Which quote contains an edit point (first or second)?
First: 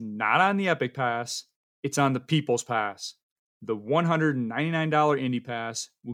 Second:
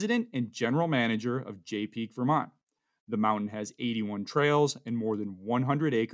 first